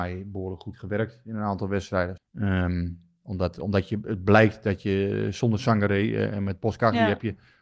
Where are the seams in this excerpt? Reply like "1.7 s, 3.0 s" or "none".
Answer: 2.2 s